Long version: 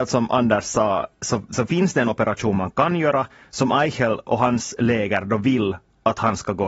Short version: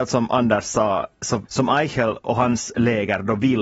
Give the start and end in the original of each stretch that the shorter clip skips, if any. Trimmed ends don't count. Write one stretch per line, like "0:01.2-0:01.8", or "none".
0:01.4-0:03.5